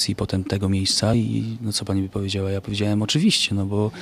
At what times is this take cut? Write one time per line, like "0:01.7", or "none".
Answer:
none